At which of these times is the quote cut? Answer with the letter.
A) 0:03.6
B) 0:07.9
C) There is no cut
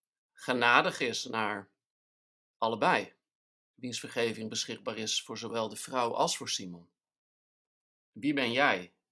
B